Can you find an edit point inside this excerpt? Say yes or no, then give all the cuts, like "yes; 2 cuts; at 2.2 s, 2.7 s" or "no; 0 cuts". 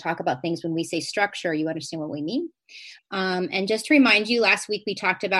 yes; 1 cut; at 3.0 s